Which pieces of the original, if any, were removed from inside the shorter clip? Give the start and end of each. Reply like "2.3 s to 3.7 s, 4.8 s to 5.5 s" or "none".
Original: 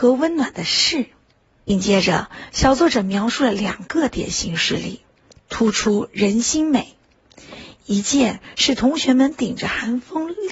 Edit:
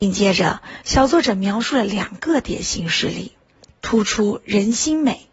none